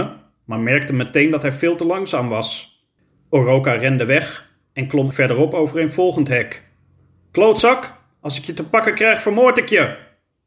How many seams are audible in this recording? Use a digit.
1